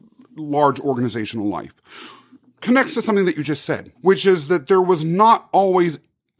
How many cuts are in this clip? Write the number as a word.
one